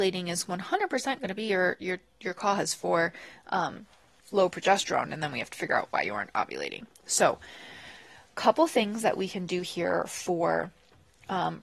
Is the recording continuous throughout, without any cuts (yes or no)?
yes